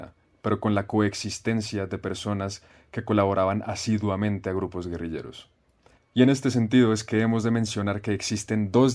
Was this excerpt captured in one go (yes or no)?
no